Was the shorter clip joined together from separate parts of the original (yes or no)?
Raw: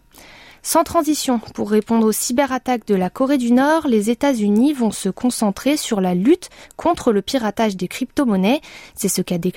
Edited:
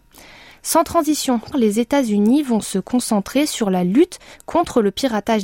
yes